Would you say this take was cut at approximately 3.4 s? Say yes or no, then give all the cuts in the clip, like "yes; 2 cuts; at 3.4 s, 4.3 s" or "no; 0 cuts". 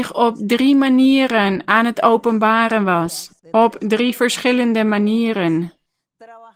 yes; 1 cut; at 3.4 s